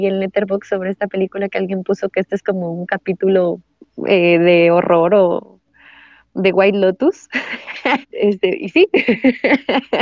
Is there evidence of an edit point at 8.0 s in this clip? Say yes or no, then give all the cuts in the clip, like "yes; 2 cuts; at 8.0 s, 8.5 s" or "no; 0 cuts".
yes; 1 cut; at 8.0 s